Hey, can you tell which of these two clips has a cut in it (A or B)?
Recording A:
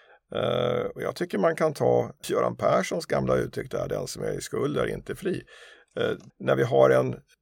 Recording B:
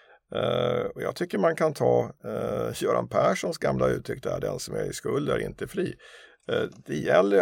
A